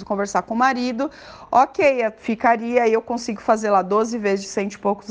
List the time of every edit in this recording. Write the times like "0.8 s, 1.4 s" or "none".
none